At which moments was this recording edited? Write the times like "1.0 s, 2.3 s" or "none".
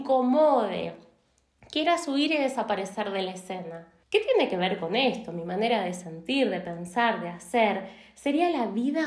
4.0 s